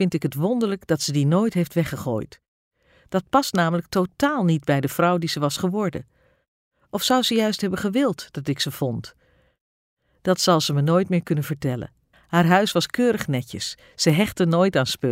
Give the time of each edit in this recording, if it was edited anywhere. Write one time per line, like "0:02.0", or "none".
0:12.1